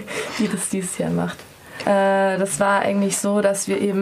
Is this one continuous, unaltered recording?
no; 1 cut; at 1.8 s

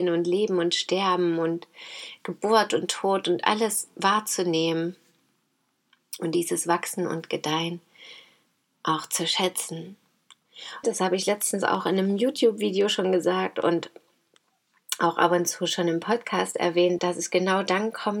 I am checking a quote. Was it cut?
yes; 2 cuts; at 10.8 s, 17.0 s

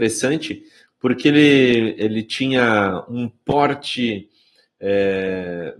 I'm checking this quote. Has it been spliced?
no; 0 cuts

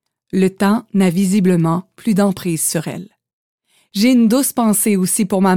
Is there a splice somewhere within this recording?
no; 0 cuts

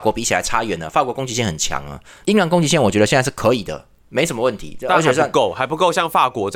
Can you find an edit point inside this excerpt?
no; 0 cuts

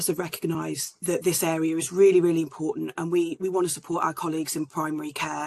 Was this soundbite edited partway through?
no; 0 cuts

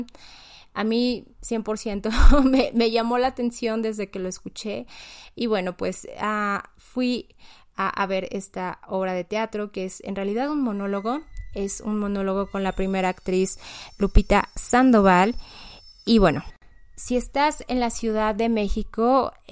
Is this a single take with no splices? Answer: yes; 0 cuts

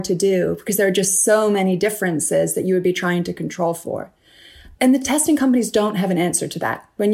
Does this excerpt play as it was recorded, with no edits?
yes; 0 cuts

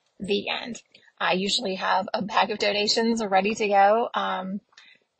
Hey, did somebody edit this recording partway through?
no; 0 cuts

